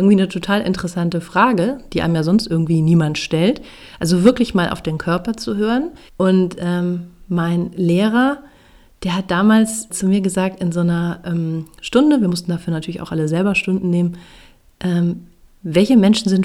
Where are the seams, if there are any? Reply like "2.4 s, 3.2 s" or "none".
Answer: 6.1 s, 9.9 s